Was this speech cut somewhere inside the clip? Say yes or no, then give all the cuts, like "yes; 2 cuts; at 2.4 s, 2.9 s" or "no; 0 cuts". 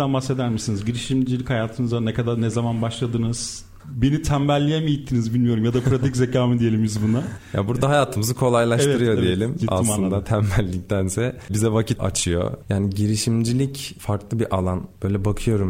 yes; 2 cuts; at 3.8 s, 12.6 s